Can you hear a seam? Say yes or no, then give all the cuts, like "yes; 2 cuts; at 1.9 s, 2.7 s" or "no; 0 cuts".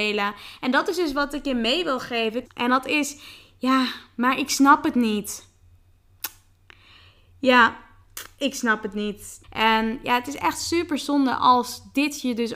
yes; 2 cuts; at 2.4 s, 9.4 s